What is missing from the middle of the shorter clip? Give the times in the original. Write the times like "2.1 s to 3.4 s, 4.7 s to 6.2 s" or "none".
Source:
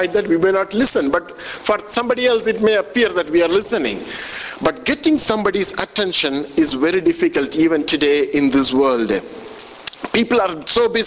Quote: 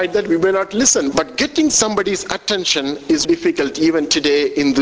1.1 s to 4.6 s, 6.7 s to 7.0 s